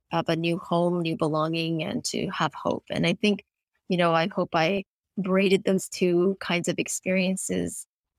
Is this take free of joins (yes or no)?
yes